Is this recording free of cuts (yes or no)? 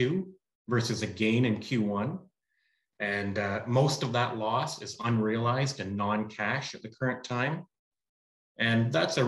yes